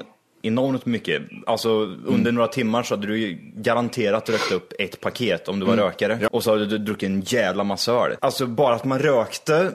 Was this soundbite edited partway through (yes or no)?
yes